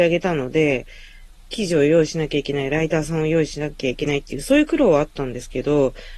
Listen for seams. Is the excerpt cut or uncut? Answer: uncut